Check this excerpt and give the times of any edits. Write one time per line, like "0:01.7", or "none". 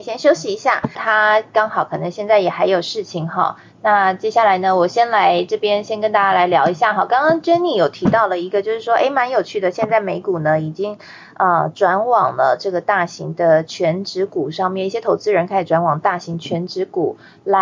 0:01.0